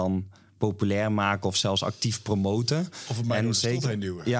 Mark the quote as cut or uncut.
uncut